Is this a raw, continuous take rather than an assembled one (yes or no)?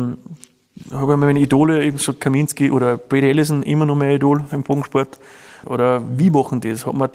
no